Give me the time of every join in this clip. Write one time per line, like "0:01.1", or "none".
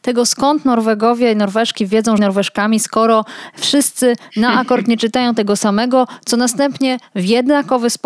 0:02.2